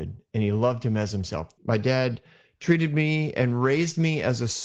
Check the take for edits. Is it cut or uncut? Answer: cut